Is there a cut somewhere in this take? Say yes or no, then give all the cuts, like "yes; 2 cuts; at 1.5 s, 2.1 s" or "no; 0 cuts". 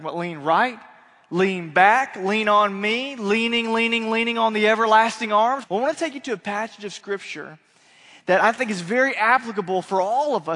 yes; 1 cut; at 5.6 s